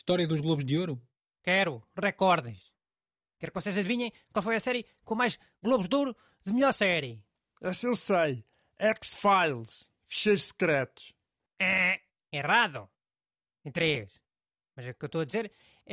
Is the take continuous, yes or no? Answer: no